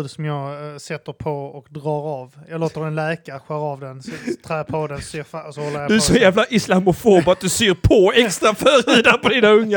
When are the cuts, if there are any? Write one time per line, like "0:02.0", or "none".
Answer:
none